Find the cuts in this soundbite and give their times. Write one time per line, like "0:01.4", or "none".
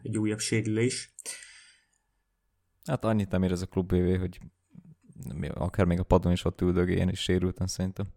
none